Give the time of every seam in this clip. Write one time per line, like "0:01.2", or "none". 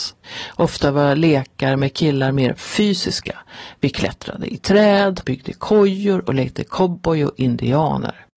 0:05.2